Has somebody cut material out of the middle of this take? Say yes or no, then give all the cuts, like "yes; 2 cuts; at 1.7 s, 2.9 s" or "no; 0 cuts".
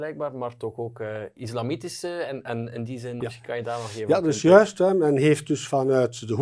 yes; 1 cut; at 3.2 s